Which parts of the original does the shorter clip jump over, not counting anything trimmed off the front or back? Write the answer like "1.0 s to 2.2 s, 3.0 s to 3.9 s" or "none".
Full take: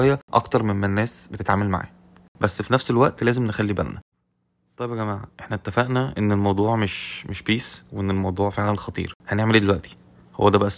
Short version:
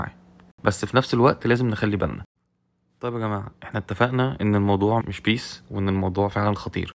6.8 s to 7.2 s